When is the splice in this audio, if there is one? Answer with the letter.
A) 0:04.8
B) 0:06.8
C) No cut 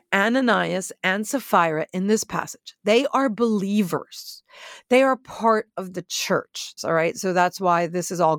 B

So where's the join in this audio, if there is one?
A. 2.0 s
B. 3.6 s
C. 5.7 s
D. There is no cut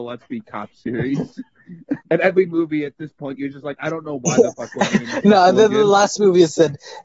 A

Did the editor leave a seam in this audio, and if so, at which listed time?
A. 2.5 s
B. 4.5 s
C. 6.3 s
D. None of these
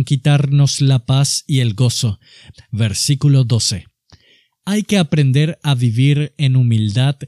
A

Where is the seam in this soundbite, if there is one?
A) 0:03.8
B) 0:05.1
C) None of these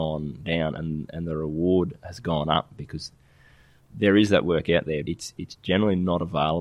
B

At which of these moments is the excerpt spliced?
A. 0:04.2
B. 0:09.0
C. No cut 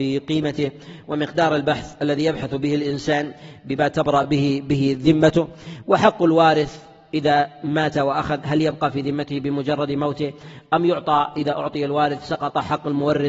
C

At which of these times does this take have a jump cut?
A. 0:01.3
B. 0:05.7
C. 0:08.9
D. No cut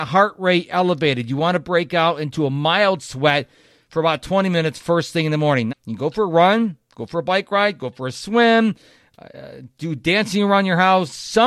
B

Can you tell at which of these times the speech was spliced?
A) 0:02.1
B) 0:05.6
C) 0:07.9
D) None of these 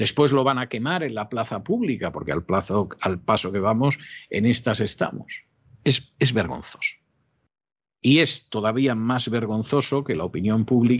D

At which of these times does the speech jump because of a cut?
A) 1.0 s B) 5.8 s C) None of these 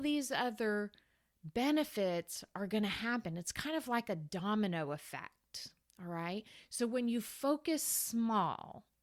C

